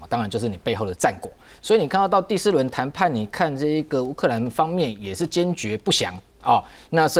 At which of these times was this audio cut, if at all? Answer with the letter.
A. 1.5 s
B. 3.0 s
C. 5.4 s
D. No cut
D